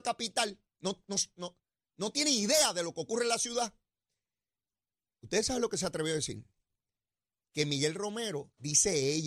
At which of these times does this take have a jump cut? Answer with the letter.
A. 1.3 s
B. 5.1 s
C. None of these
C